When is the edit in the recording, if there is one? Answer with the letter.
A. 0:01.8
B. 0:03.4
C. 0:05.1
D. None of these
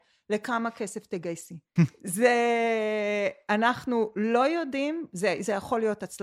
A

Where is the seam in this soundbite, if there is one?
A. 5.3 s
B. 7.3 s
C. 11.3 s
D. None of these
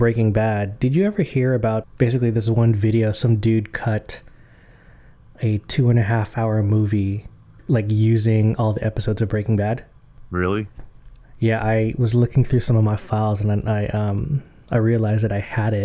D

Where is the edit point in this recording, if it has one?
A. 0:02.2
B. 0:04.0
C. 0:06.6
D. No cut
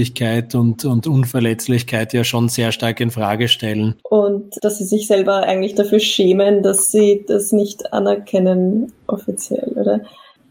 B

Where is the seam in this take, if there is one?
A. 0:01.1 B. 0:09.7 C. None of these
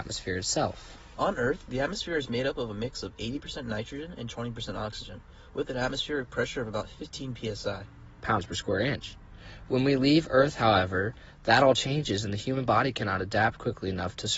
C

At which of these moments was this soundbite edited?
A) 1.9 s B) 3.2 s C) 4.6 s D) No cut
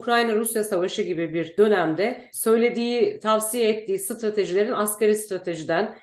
D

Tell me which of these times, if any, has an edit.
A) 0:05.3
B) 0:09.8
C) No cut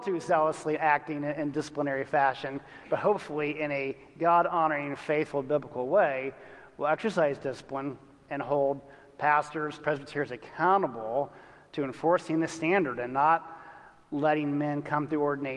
B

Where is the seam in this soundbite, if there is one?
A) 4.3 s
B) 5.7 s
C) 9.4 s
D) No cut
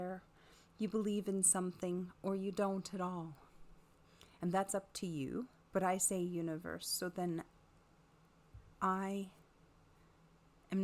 B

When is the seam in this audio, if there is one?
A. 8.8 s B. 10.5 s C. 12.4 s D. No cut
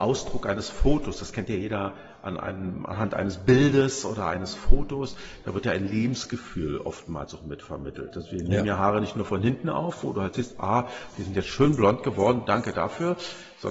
D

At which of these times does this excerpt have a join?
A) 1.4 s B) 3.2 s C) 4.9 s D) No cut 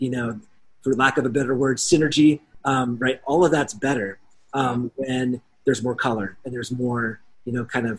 D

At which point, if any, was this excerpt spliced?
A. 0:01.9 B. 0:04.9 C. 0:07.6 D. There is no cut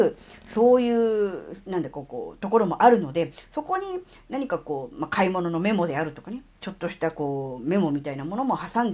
D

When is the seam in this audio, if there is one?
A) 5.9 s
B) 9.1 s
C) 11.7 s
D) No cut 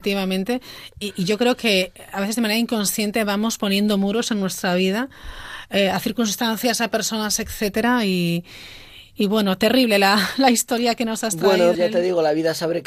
C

